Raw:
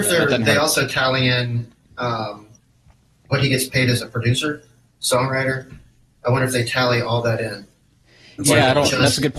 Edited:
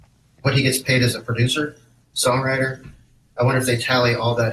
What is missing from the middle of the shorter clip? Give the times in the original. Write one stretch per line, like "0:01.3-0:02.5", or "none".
none